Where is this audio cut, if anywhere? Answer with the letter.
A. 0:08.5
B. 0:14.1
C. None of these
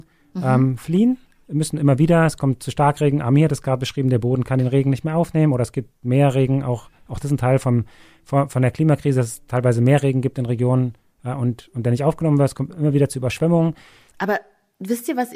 B